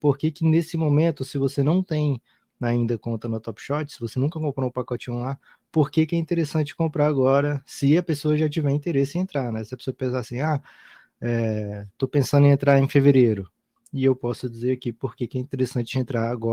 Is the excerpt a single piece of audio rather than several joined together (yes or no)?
yes